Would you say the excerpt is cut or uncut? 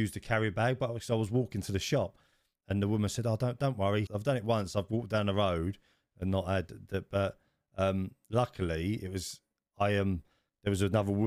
cut